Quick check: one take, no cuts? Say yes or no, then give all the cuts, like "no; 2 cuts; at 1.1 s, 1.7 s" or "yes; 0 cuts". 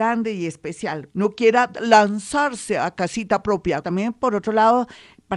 no; 2 cuts; at 1.1 s, 3.8 s